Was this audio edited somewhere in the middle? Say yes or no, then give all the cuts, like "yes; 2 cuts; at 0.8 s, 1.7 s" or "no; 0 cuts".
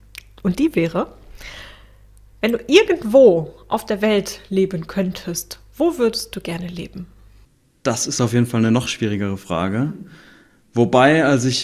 no; 0 cuts